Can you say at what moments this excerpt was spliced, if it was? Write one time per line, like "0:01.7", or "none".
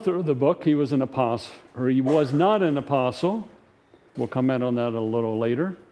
0:04.1